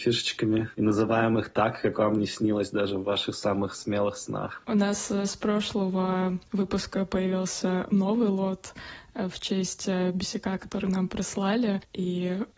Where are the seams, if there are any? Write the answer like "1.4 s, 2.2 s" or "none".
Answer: none